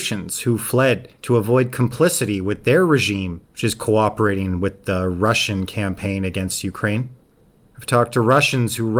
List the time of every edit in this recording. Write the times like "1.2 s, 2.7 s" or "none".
1.2 s, 3.4 s

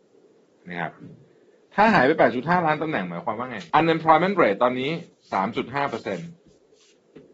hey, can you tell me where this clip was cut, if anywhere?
3.7 s

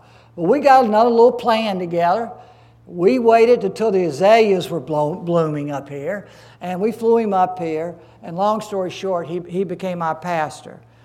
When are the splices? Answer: 9.4 s

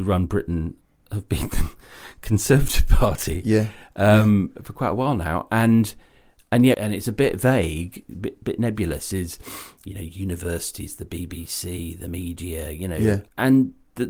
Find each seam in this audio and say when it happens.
6.7 s

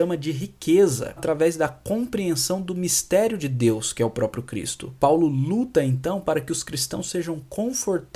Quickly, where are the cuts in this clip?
1.2 s, 5.0 s

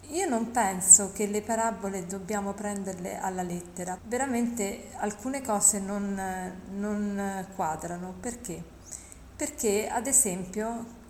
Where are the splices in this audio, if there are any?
4.0 s

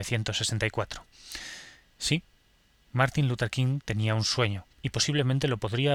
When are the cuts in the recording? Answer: 4.7 s

